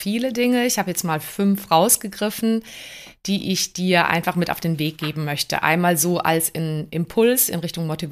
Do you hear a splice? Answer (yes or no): no